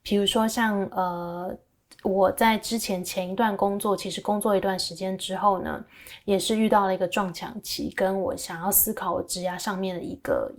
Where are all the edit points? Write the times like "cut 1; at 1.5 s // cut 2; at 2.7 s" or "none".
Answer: none

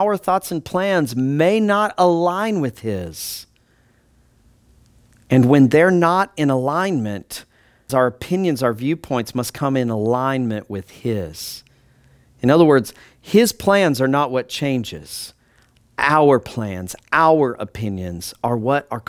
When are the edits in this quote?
cut 1; at 7.9 s

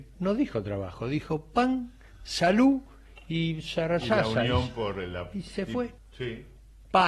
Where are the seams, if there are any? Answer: cut 1; at 6.0 s

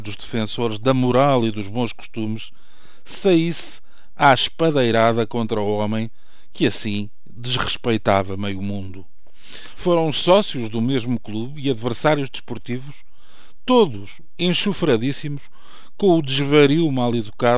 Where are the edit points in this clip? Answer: cut 1; at 9.7 s

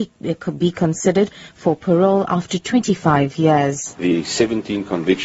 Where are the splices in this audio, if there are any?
none

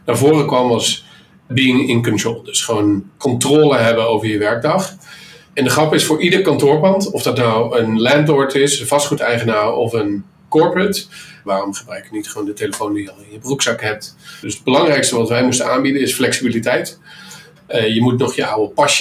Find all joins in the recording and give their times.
cut 1; at 11.5 s // cut 2; at 14.4 s // cut 3; at 17.6 s

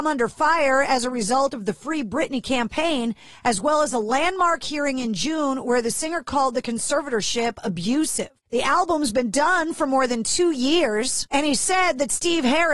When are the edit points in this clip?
cut 1; at 8.5 s

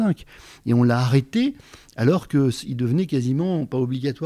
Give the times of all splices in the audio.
none

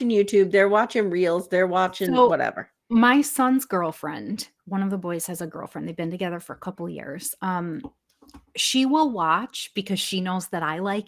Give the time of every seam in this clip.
none

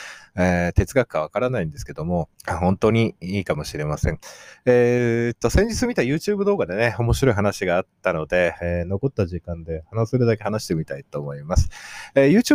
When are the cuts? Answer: cut 1; at 2.3 s

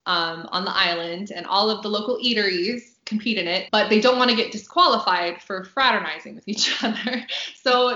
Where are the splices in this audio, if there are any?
cut 1; at 3.7 s

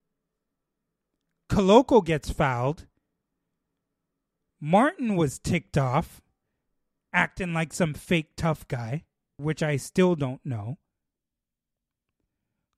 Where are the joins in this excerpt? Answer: cut 1; at 9.4 s

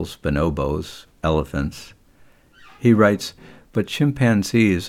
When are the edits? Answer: none

